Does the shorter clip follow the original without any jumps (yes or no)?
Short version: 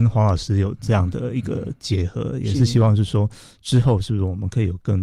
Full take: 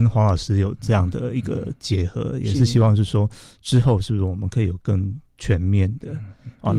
yes